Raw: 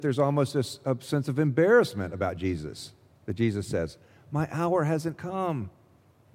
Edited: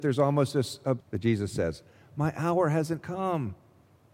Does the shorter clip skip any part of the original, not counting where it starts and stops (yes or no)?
yes